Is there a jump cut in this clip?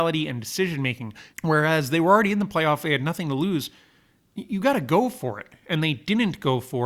yes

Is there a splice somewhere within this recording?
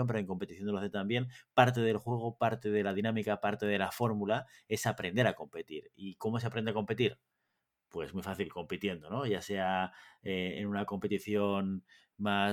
no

